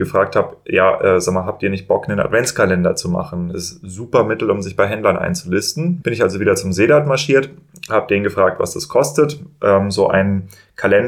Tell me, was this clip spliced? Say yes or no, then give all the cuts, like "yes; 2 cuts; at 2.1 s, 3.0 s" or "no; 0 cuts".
yes; 1 cut; at 6.0 s